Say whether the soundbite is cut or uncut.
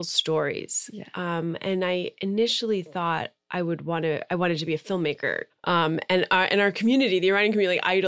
cut